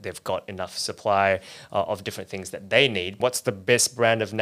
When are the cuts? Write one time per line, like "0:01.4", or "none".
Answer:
0:03.2